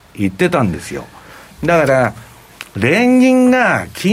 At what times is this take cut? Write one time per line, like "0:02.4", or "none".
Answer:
0:01.6